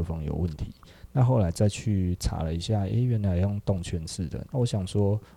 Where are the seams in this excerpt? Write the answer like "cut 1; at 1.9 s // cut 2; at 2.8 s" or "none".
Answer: cut 1; at 4.4 s